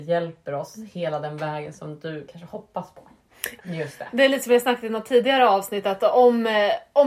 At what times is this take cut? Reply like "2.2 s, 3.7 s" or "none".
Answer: 3.6 s